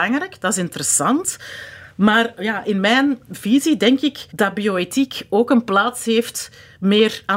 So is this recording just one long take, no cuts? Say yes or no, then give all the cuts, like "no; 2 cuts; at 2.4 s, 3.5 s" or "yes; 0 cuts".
no; 1 cut; at 4.3 s